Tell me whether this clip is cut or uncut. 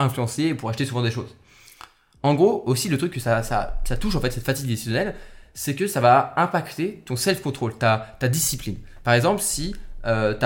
uncut